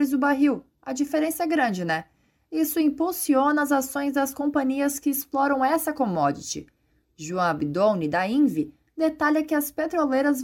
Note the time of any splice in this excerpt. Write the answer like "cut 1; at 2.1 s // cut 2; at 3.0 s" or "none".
none

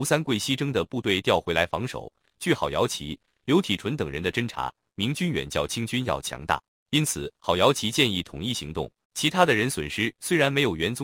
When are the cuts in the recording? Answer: cut 1; at 4.9 s // cut 2; at 9.0 s

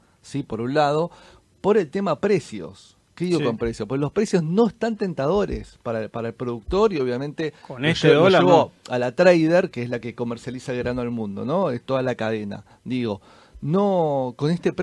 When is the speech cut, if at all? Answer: none

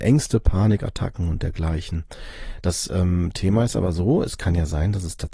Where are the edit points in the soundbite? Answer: cut 1; at 2.6 s

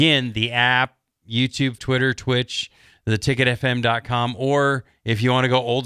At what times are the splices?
cut 1; at 1.8 s

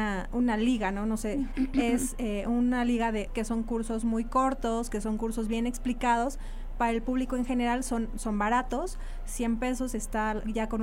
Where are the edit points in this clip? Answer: cut 1; at 1.5 s // cut 2; at 3.3 s

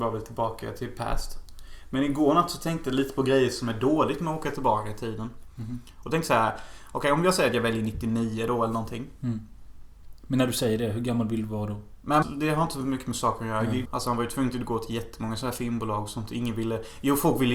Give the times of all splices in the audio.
cut 1; at 12.2 s // cut 2; at 13.8 s

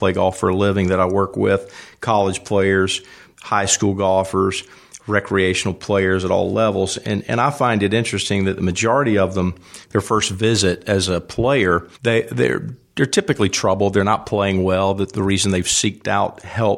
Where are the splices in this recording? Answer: cut 1; at 9.8 s // cut 2; at 11.9 s

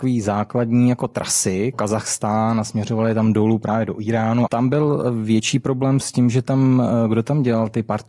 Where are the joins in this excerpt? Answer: cut 1; at 1.7 s // cut 2; at 4.5 s

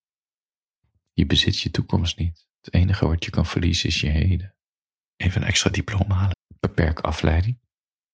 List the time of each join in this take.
cut 1; at 5.1 s // cut 2; at 6.3 s

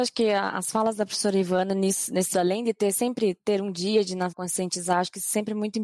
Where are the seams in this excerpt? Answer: cut 1; at 2.3 s // cut 2; at 4.3 s

